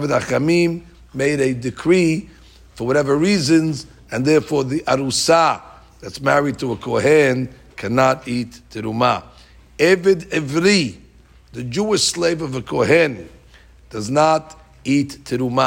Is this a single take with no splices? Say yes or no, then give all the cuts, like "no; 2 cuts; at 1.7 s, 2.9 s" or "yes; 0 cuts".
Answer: yes; 0 cuts